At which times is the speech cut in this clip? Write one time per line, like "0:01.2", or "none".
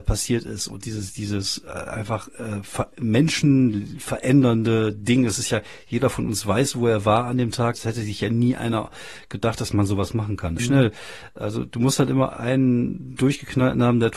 0:07.7
0:10.6